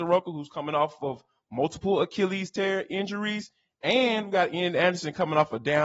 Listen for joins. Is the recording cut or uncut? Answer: uncut